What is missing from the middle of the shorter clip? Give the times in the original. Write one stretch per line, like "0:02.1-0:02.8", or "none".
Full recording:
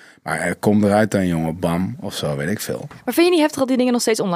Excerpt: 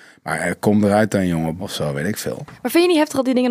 0:01.6-0:02.0